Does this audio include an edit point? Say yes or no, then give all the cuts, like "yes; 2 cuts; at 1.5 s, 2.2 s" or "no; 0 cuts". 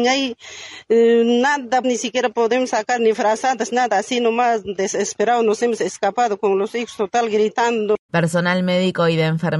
yes; 2 cuts; at 1.8 s, 8.1 s